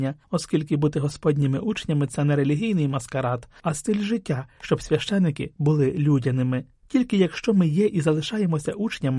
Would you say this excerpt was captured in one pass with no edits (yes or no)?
no